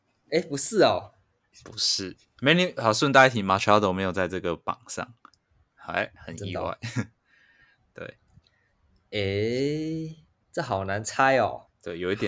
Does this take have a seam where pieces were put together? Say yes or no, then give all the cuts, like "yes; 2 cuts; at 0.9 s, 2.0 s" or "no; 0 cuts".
no; 0 cuts